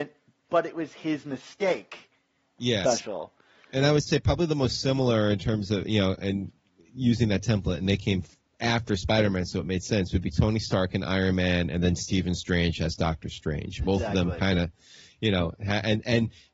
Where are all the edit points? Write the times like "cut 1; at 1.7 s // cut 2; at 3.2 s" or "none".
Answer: cut 1; at 2.8 s